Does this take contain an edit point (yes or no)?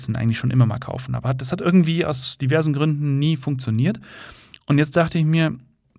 no